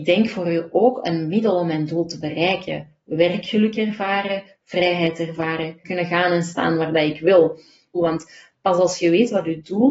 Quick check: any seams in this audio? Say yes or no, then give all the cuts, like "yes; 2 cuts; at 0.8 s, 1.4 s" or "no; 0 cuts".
yes; 2 cuts; at 5.8 s, 8.0 s